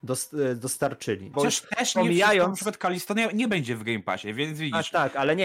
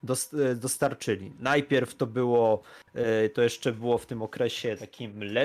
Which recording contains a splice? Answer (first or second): first